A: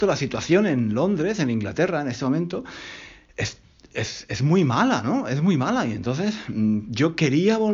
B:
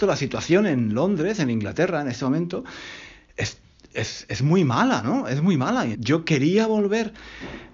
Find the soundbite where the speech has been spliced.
B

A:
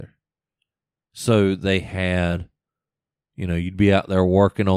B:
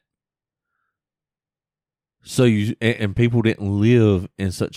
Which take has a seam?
B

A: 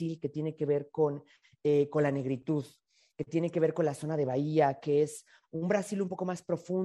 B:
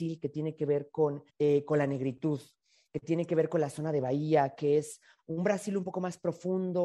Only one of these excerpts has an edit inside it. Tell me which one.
B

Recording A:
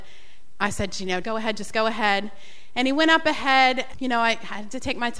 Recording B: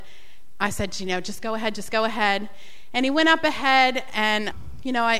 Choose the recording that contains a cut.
A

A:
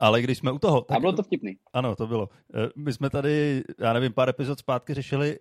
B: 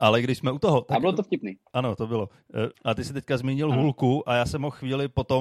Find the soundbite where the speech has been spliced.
B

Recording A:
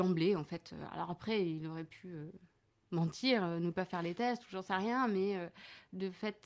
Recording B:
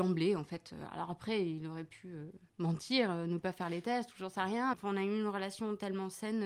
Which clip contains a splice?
B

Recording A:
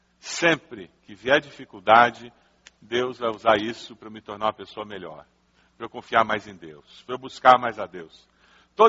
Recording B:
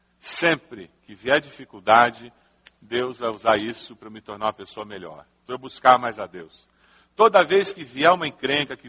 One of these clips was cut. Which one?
B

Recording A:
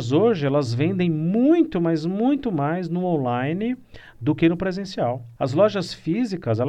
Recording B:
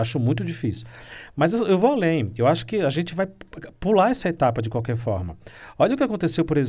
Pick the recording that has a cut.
A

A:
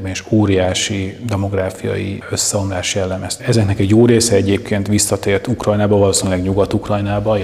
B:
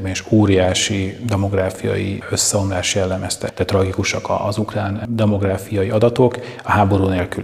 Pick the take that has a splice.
A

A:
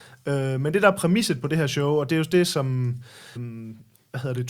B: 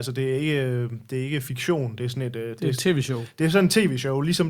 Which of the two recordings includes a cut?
A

